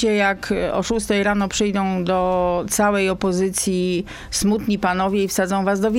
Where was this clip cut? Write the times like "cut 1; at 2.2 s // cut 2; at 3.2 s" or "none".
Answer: none